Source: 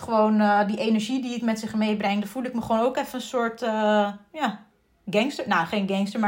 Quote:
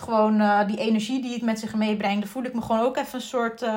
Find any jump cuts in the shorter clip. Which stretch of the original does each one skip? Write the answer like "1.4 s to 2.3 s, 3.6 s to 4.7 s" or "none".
none